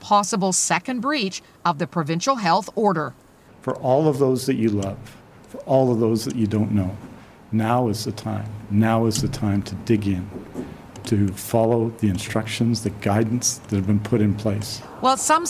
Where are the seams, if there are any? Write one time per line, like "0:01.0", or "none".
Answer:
0:12.8